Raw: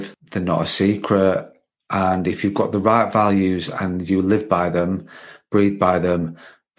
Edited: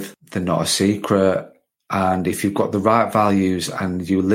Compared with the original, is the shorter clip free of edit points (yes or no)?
yes